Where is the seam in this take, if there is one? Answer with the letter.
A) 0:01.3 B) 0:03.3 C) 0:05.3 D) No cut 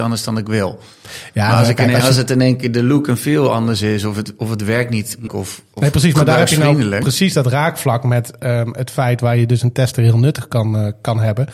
C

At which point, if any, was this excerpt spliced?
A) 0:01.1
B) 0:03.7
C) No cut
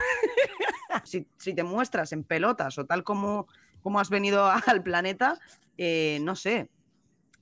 A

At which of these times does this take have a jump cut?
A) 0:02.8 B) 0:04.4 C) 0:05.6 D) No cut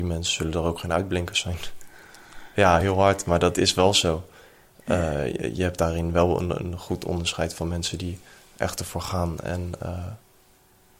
D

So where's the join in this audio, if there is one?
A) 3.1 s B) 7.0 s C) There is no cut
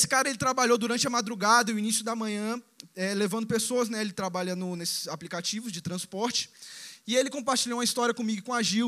C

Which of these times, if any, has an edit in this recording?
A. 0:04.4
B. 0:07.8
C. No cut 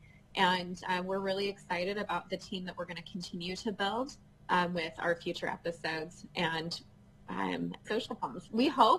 B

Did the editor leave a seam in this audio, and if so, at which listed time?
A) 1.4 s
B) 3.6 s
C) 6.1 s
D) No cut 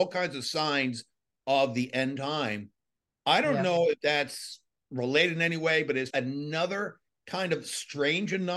C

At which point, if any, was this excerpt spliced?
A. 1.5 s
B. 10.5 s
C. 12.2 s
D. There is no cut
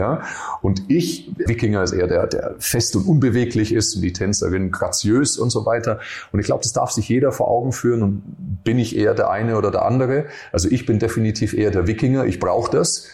A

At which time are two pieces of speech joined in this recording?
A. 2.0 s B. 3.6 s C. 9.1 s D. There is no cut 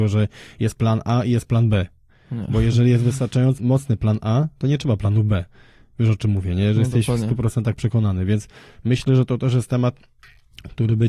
B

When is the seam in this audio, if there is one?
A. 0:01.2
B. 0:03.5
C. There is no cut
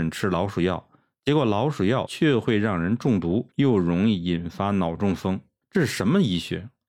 B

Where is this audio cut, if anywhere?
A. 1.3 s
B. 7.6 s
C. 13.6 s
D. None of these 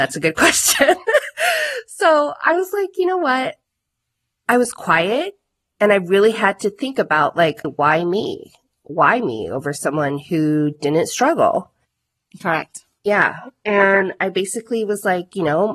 B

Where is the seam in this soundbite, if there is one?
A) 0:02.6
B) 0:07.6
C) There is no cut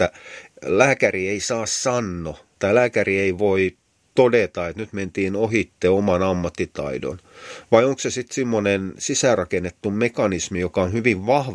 A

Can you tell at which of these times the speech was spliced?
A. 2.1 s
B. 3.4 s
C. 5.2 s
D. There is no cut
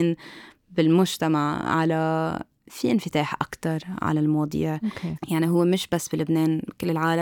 C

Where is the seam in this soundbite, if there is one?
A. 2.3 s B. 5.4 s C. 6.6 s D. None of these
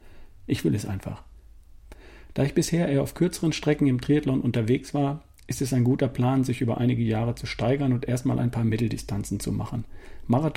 D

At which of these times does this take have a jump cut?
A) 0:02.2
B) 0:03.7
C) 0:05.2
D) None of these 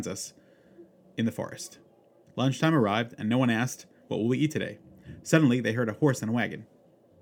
A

